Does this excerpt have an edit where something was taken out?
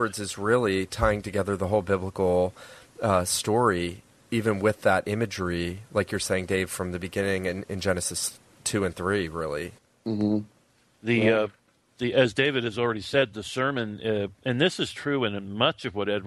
no; 0 cuts

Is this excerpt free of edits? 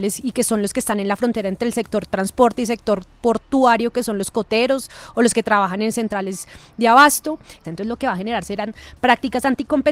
no; 1 cut; at 7.6 s

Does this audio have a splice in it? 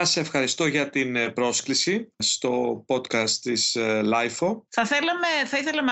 yes; 1 cut; at 4.7 s

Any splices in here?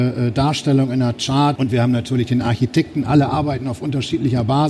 yes; 1 cut; at 1.6 s

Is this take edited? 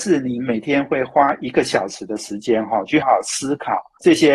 yes; 1 cut; at 3.0 s

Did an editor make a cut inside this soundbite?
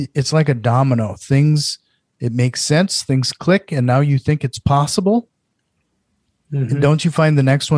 no; 0 cuts

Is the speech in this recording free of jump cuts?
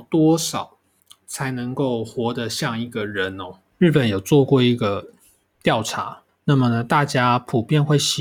yes; 0 cuts

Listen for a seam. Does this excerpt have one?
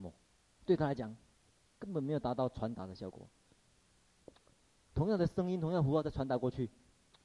no; 0 cuts

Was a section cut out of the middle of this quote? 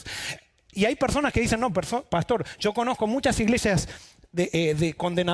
no; 0 cuts

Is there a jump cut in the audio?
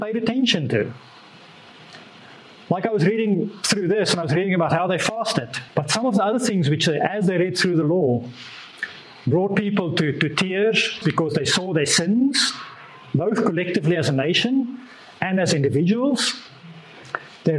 yes; 2 cuts; at 5.7 s, 11.0 s

